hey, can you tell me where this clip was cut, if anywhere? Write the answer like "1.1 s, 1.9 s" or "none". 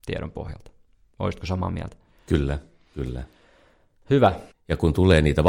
4.5 s